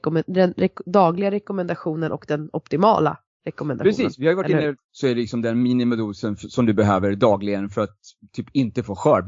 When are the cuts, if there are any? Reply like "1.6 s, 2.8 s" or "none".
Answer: 4.8 s

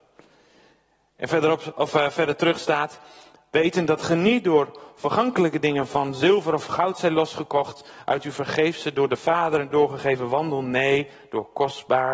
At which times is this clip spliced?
none

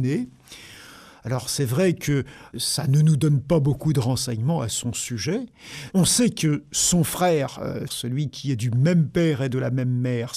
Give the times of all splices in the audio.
2.5 s, 5.9 s, 7.9 s

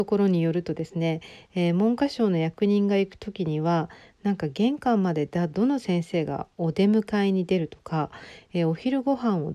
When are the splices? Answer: none

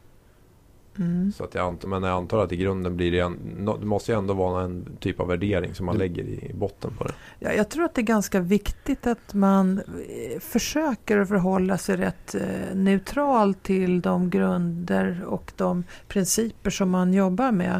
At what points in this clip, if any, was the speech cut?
1.9 s

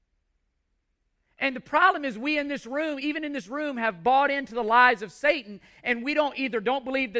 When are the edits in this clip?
none

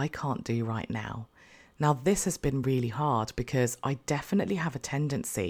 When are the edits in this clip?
none

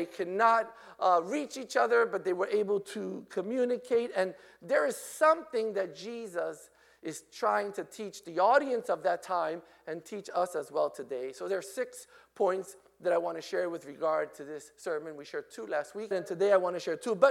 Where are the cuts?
16.1 s

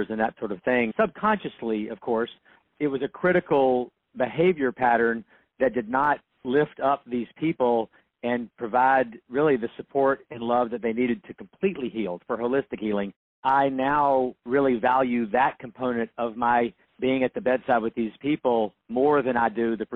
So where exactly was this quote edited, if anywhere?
0.9 s, 13.3 s

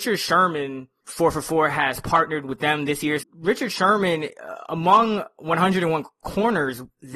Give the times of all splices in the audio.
1.0 s, 3.2 s

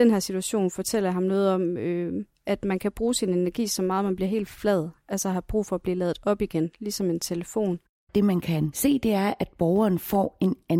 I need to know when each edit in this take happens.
none

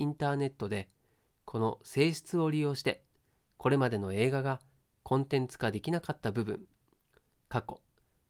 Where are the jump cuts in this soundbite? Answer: none

